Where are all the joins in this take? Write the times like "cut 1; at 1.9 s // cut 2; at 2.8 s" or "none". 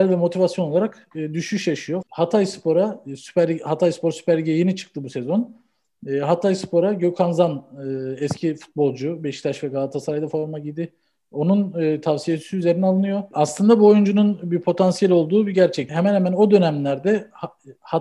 cut 1; at 2.0 s // cut 2; at 13.3 s // cut 3; at 15.9 s